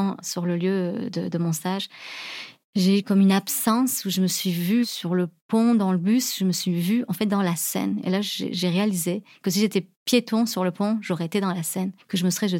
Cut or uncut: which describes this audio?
uncut